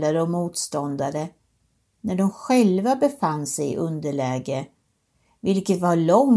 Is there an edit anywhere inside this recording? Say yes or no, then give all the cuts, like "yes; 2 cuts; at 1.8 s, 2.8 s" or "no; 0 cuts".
no; 0 cuts